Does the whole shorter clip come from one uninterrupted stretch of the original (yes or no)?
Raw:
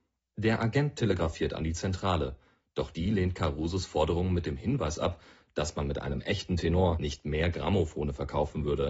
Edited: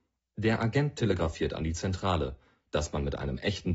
no